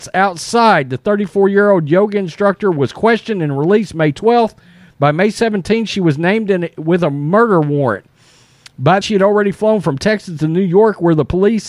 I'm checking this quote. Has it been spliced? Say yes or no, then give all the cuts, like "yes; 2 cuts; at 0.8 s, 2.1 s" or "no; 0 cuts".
yes; 1 cut; at 9.0 s